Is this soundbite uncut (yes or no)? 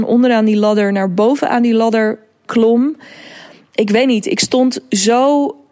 no